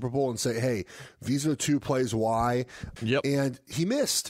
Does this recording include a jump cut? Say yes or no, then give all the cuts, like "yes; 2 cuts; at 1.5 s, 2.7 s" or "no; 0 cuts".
yes; 1 cut; at 3.0 s